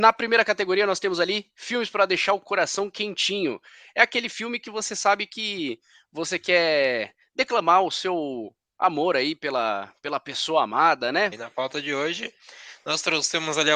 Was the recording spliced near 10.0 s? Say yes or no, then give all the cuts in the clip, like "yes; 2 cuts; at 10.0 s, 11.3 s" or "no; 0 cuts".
no; 1 cut; at 11.3 s